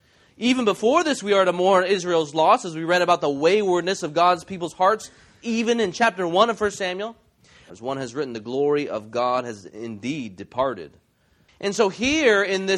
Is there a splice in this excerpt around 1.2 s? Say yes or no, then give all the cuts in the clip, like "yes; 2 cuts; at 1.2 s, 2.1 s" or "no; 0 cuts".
no; 2 cuts; at 7.7 s, 11.5 s